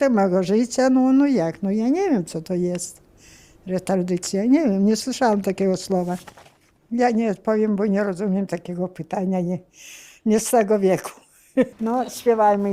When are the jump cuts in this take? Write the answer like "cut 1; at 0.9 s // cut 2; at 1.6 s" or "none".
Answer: cut 1; at 6.8 s // cut 2; at 11.7 s